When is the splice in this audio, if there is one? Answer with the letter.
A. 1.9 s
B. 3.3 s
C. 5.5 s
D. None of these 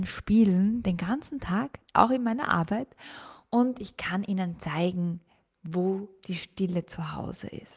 D